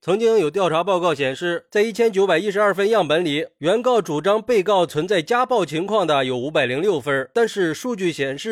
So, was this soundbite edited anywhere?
no; 0 cuts

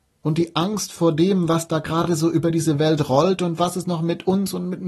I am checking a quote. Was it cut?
no; 0 cuts

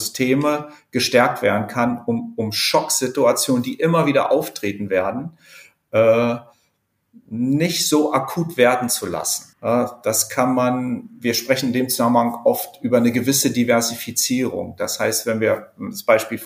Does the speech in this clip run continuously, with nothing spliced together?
no; 1 cut; at 9.5 s

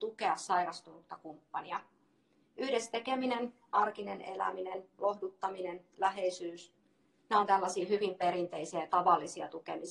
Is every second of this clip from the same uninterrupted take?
yes; 0 cuts

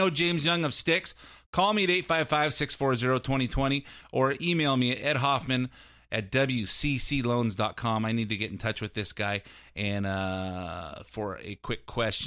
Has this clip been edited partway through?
no; 0 cuts

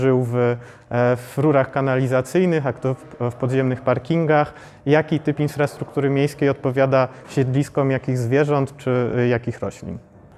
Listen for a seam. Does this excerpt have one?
no; 0 cuts

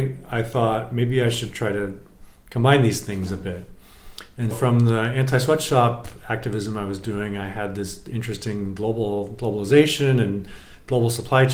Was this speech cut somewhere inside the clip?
yes; 1 cut; at 4.5 s

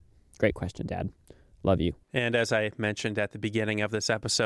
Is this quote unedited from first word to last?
no; 1 cut; at 2.0 s

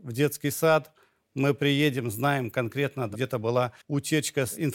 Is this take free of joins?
no; 1 cut; at 3.8 s

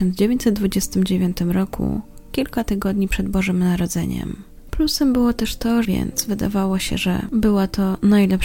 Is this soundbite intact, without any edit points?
no; 2 cuts; at 4.7 s, 5.8 s

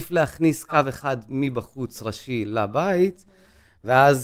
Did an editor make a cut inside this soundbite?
no; 0 cuts

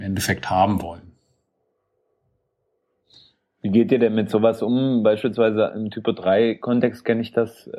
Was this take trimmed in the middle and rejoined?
no; 0 cuts

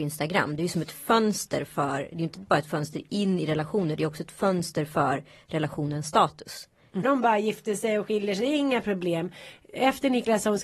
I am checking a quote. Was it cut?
yes; 1 cut; at 7.0 s

